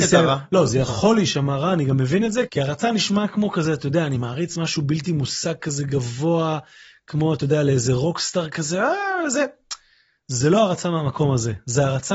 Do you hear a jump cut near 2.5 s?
yes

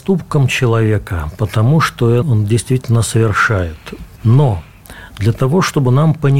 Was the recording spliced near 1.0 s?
no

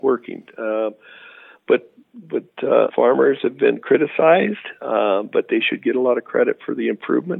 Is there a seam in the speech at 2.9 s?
yes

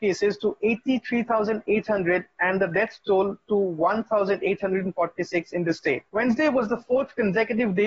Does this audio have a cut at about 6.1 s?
yes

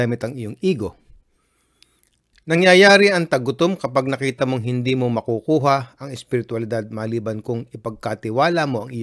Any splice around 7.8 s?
no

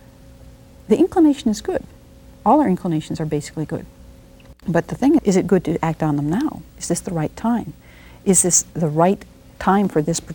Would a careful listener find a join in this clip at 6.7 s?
yes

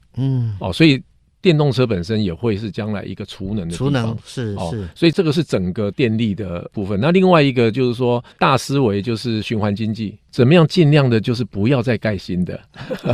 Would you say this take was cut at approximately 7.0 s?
no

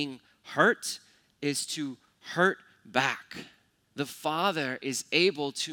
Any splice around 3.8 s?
yes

